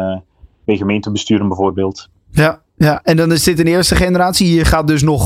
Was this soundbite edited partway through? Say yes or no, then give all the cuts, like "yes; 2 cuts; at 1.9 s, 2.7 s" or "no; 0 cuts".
no; 0 cuts